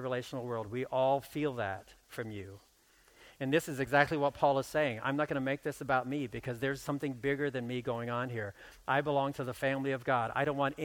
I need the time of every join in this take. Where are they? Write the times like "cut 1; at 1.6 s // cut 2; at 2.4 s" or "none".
none